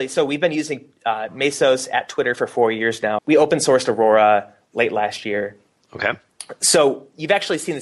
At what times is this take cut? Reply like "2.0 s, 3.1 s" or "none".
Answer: 3.2 s